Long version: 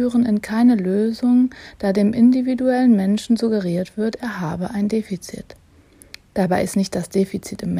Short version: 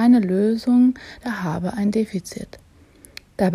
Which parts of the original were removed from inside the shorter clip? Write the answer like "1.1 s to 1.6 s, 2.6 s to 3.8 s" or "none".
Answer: 1.8 s to 4.2 s